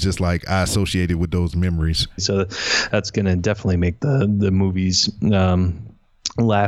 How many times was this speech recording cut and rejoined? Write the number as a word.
one